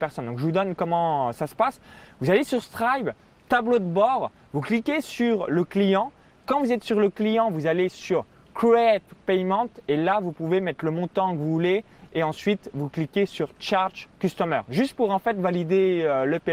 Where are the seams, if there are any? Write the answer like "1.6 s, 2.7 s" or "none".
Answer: none